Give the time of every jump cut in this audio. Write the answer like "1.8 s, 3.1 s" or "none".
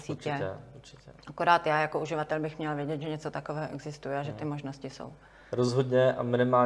none